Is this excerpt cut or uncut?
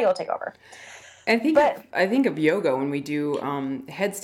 uncut